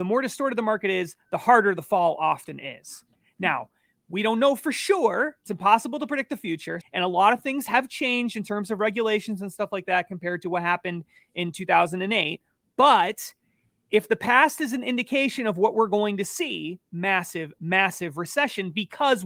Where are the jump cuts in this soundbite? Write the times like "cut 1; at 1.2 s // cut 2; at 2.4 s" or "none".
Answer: cut 1; at 6.8 s // cut 2; at 16.9 s